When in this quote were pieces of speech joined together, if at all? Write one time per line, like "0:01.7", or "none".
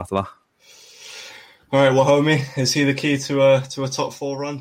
none